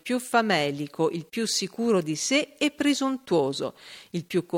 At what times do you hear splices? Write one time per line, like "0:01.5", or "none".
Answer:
none